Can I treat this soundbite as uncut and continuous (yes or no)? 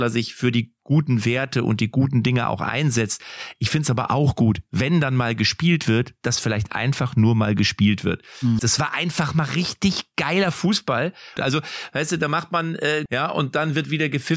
no